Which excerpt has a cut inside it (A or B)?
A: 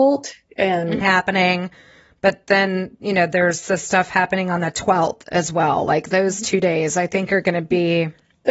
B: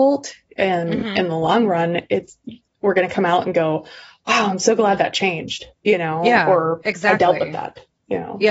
A